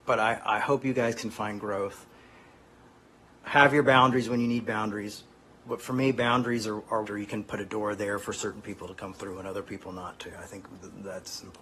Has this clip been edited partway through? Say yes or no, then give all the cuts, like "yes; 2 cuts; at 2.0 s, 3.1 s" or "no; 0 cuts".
yes; 1 cut; at 7.0 s